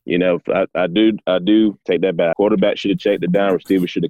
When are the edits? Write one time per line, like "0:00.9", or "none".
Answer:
0:02.3